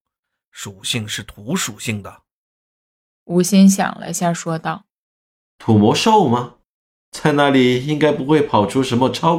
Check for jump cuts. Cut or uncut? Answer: uncut